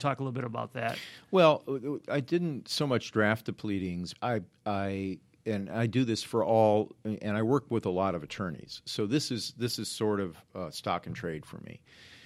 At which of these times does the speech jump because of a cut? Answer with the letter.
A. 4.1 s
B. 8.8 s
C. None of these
A